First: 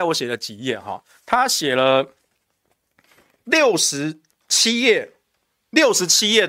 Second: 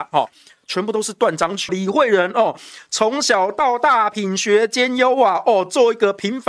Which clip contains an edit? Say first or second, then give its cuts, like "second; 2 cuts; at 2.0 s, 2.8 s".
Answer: second; 1 cut; at 1.7 s